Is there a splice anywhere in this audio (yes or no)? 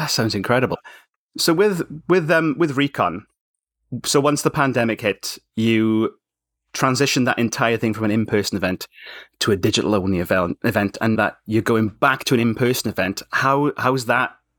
yes